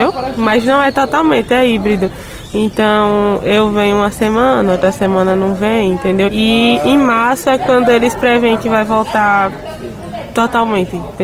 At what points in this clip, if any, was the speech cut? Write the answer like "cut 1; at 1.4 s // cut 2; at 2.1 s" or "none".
cut 1; at 6.3 s